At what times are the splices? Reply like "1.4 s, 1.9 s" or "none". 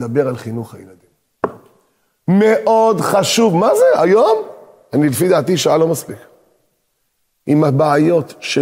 none